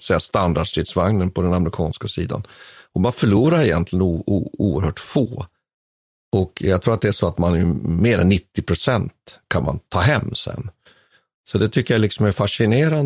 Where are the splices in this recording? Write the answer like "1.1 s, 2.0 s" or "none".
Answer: none